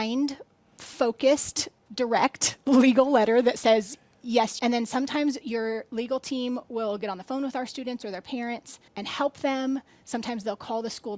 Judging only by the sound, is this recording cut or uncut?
cut